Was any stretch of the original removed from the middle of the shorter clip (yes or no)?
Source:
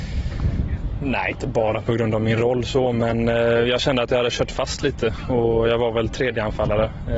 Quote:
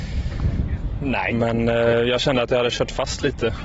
yes